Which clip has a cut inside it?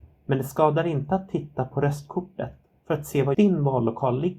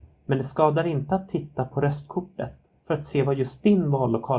first; 1 cut; at 3.3 s

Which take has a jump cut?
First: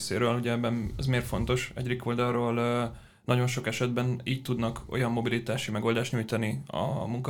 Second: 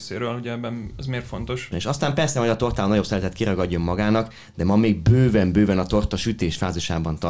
second; 1 cut; at 1.7 s

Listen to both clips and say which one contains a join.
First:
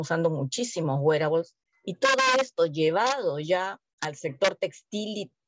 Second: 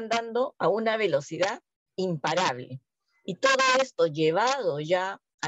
first; 1 cut; at 1.7 s

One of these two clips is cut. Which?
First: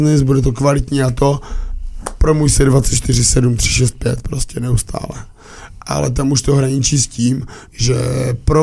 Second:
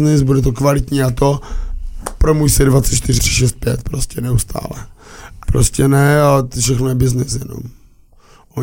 second; 2 cuts; at 3.2 s, 5.4 s

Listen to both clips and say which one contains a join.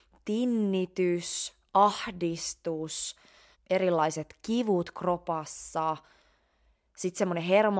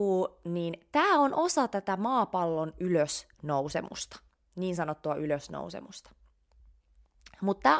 first; 1 cut; at 3.5 s

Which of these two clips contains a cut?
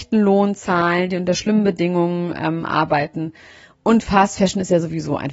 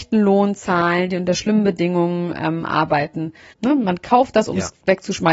second; 1 cut; at 3.5 s

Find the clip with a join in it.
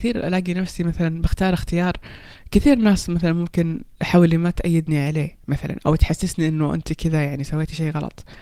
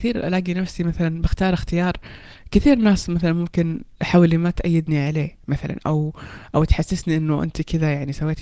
first; 1 cut; at 5.8 s

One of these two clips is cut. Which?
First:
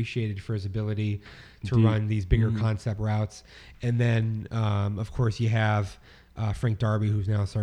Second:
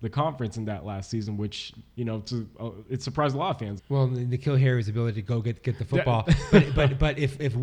second; 1 cut; at 3.8 s

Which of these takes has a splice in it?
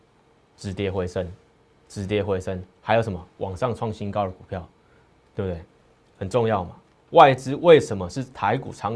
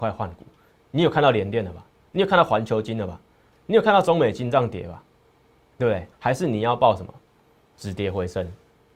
second; 1 cut; at 6.1 s

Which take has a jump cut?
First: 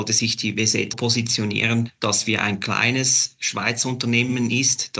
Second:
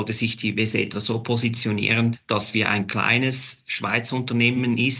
first; 1 cut; at 0.9 s

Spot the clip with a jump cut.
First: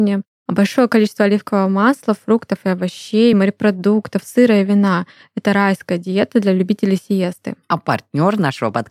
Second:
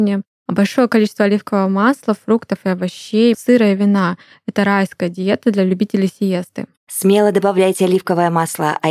second; 2 cuts; at 3.3 s, 6.8 s

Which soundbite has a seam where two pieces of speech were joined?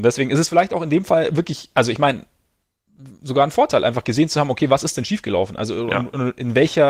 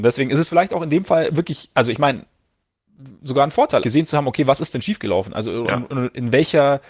second; 1 cut; at 3.8 s

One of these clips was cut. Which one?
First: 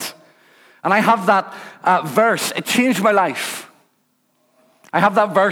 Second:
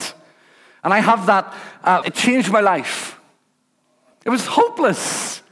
second; 2 cuts; at 2.0 s, 4.1 s

